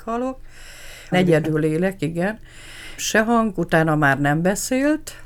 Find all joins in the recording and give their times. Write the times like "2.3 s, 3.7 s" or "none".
1.1 s, 3.0 s